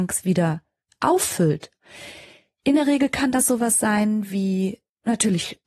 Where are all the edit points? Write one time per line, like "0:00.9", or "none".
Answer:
none